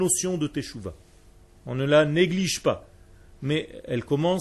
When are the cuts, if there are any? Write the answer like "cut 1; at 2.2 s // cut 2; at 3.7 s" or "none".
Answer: cut 1; at 1.5 s